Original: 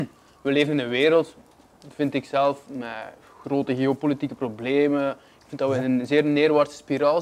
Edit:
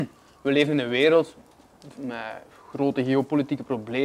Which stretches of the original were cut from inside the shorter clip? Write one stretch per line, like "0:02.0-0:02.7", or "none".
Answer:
0:01.9-0:02.6